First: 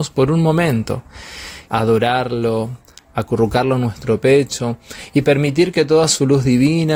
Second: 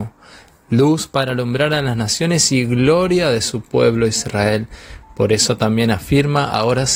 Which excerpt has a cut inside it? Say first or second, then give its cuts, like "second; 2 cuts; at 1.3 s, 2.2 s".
first; 1 cut; at 1.7 s